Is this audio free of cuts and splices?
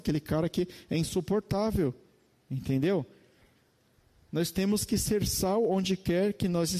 yes; 0 cuts

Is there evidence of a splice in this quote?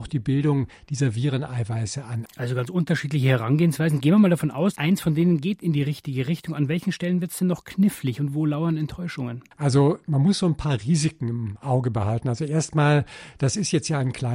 yes; 2 cuts; at 2.3 s, 9.5 s

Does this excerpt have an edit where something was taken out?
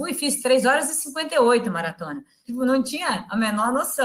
yes; 1 cut; at 2.4 s

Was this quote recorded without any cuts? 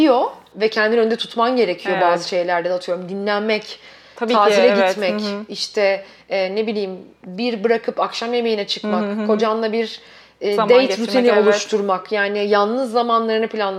yes; 0 cuts

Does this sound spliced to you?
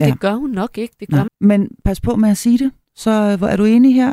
yes; 1 cut; at 1.3 s

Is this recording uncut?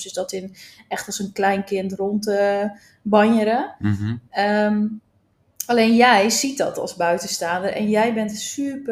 yes; 0 cuts

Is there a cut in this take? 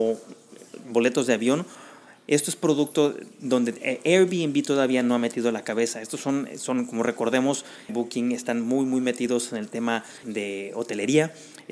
yes; 2 cuts; at 7.9 s, 10.2 s

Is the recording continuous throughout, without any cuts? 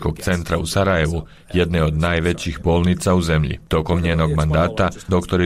yes; 0 cuts

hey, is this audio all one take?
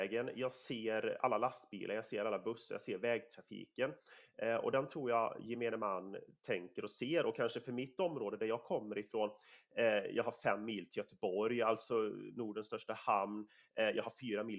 yes; 0 cuts

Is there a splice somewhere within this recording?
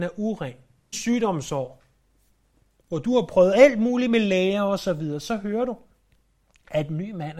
yes; 1 cut; at 0.9 s

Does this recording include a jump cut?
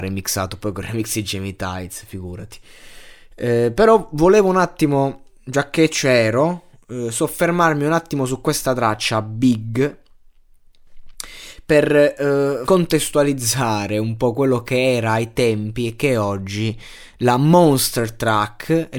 yes; 1 cut; at 12.7 s

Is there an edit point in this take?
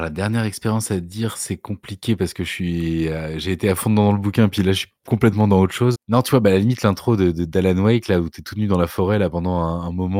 yes; 1 cut; at 5.9 s

